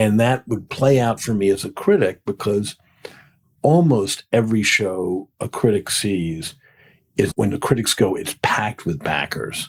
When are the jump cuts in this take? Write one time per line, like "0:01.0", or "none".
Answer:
0:03.6
0:07.3

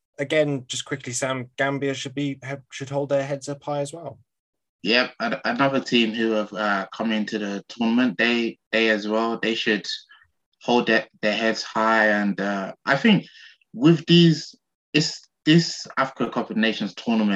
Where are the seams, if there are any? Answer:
0:08.6

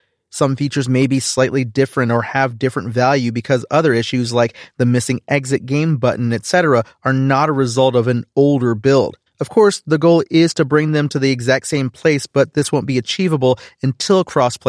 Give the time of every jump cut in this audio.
0:09.3

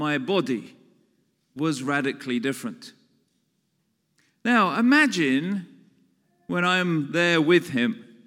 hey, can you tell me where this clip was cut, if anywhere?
none

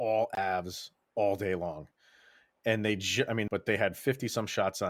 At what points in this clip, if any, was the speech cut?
0:03.5

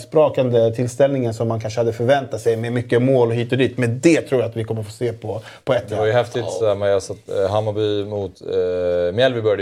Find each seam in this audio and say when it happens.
none

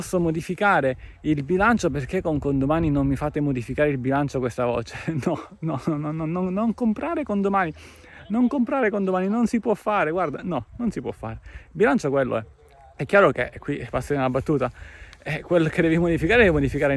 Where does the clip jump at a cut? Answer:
none

